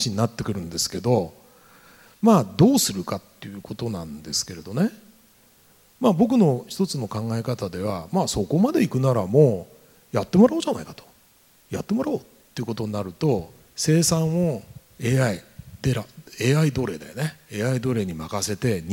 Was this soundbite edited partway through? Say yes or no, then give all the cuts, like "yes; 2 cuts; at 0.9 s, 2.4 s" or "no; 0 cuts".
no; 0 cuts